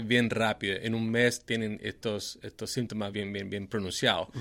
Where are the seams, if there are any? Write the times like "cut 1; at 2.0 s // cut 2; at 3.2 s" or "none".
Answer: cut 1; at 3.1 s